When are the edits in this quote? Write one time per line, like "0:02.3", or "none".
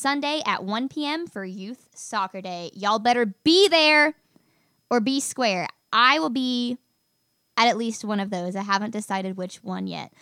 none

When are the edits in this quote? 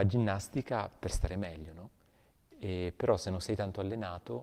none

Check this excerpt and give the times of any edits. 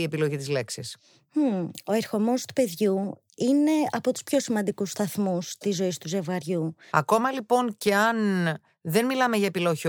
0:06.9

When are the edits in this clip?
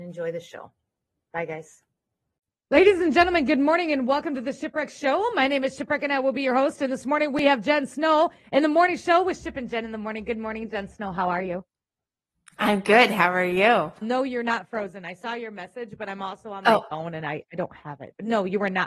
0:14.0

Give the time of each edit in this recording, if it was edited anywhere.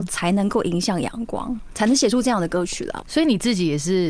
0:03.0

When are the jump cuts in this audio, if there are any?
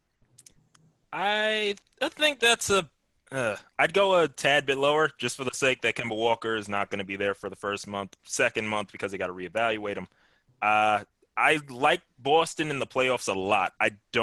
0:08.2

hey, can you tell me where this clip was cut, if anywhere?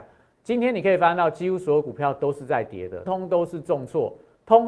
0:03.1

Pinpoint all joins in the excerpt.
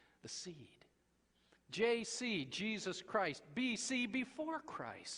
0:01.6

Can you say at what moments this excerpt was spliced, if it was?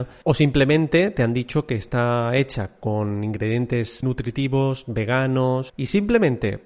0:04.0
0:05.7

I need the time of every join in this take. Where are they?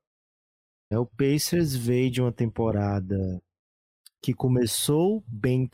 0:00.9

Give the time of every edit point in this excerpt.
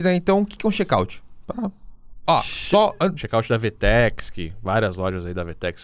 0:03.2

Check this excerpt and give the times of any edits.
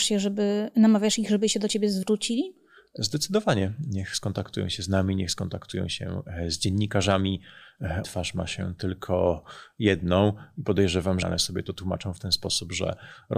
0:08.0
0:11.2

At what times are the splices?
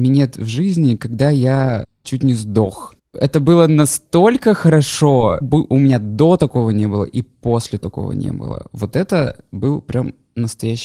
0:05.4

